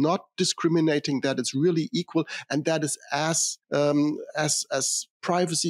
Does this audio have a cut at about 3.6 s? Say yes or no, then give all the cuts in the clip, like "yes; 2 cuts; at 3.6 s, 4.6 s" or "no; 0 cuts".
yes; 1 cut; at 3.6 s